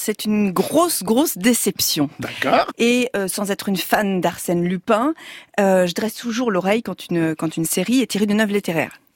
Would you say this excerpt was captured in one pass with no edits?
no; 1 cut; at 2.7 s

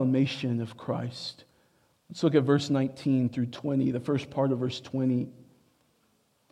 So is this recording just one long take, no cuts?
yes; 0 cuts

